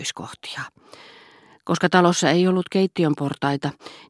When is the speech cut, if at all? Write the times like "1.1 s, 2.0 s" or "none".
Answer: none